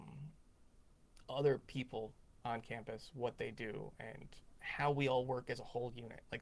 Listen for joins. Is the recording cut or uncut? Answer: uncut